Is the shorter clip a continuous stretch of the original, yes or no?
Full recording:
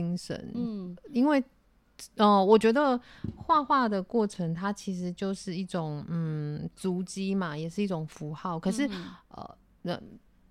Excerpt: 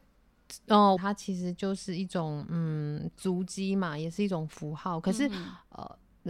no